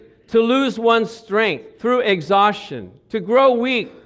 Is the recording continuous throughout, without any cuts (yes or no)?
no